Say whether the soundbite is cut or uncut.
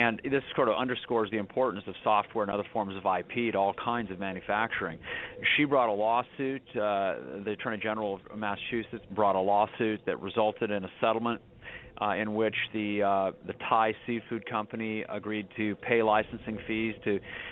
cut